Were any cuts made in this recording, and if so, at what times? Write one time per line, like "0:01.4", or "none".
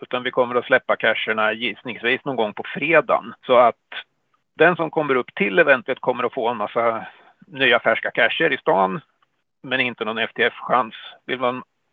0:03.4